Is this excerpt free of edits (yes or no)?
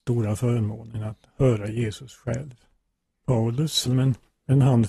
no